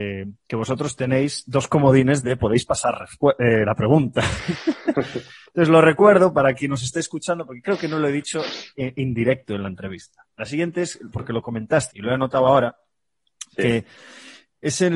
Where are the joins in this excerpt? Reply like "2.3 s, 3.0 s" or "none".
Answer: 10.3 s, 11.9 s